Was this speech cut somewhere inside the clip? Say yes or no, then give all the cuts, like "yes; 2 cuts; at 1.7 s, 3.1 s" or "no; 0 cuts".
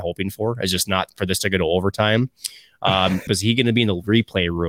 yes; 1 cut; at 3.3 s